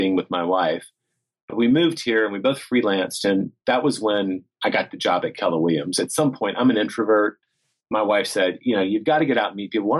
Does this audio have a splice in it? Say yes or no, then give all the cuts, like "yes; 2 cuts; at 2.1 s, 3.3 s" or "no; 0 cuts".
no; 0 cuts